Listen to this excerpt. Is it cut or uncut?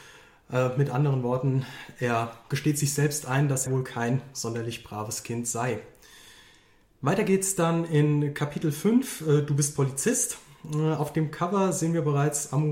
cut